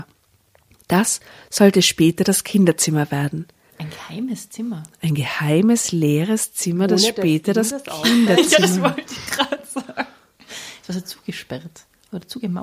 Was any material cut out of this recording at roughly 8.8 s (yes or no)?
no